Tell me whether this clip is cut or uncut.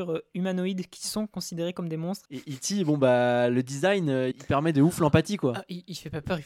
cut